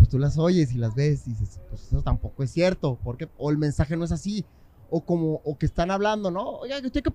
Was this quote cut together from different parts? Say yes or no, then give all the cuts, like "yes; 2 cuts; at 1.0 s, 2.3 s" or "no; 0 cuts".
yes; 1 cut; at 3.3 s